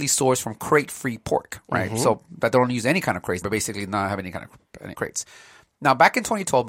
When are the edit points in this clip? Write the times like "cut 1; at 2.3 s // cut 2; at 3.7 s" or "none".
cut 1; at 3.4 s // cut 2; at 4.9 s